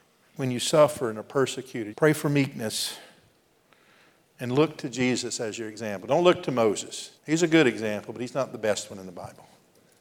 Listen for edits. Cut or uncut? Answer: cut